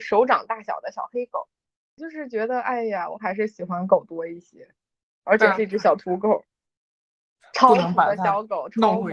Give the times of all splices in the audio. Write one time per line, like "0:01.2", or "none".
0:02.0